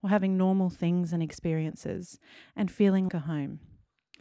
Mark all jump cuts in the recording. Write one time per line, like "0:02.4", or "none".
0:03.1